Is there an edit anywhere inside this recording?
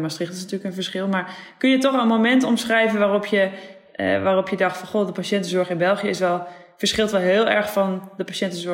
no; 0 cuts

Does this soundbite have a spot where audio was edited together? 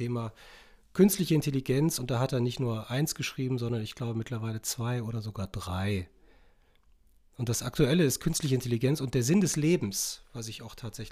no; 0 cuts

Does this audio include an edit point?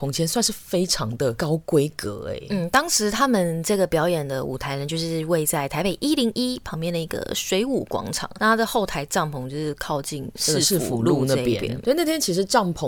no; 0 cuts

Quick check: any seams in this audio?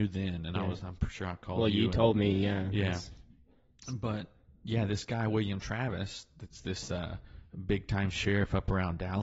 no; 0 cuts

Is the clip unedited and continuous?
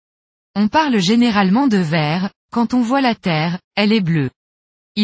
no; 1 cut; at 2.4 s

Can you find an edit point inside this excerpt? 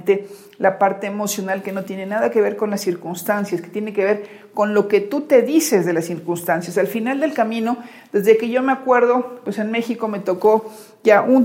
no; 0 cuts

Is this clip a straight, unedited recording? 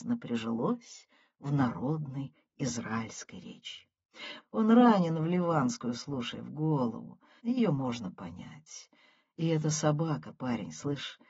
no; 2 cuts; at 4.4 s, 7.4 s

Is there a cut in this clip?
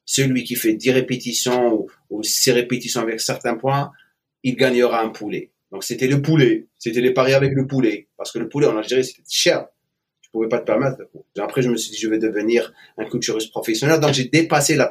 yes; 1 cut; at 11.4 s

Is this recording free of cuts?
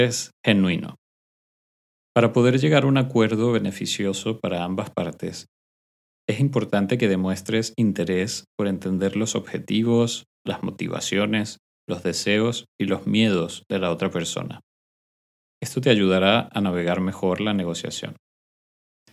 yes; 0 cuts

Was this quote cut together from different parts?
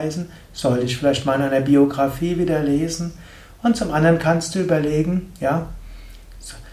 no; 0 cuts

